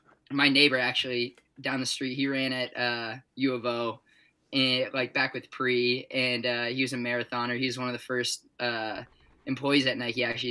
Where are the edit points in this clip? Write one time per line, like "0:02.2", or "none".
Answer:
0:03.3